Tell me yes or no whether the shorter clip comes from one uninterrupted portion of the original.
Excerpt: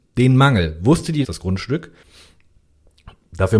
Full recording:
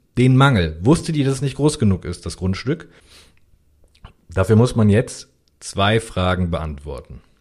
no